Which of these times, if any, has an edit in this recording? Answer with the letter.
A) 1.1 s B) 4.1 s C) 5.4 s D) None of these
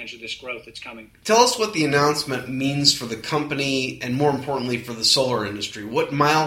D